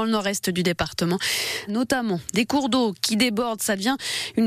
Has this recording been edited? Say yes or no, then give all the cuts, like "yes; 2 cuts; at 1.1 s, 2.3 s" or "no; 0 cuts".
yes; 1 cut; at 1.7 s